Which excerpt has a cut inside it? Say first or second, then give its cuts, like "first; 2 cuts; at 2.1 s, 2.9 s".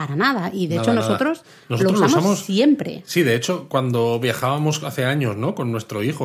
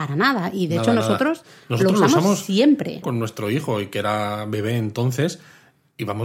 second; 1 cut; at 3.0 s